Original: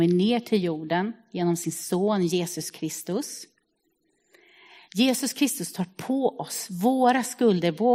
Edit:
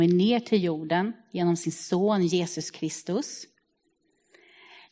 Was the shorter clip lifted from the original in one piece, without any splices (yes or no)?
yes